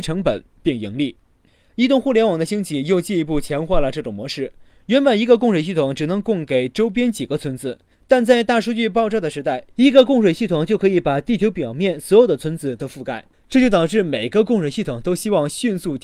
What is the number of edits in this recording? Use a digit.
0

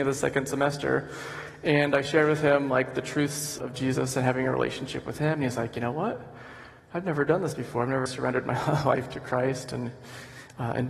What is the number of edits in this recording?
2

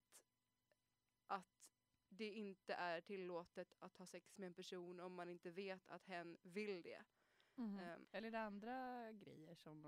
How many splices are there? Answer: 1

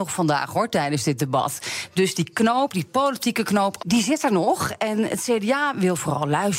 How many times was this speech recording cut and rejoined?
1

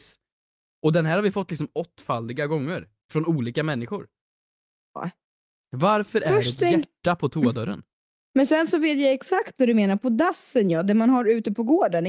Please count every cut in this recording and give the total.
2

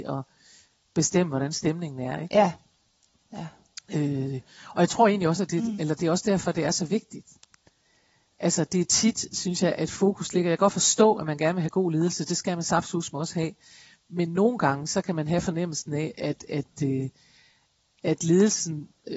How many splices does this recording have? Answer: 0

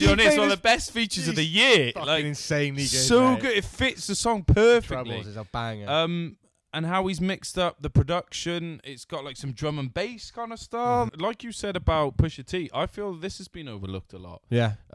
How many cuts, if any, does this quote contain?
1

